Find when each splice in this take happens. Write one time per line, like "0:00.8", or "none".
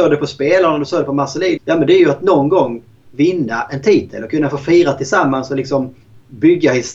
0:01.6